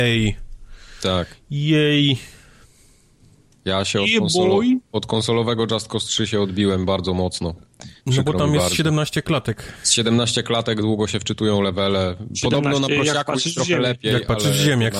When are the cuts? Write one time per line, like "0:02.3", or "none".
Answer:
0:08.0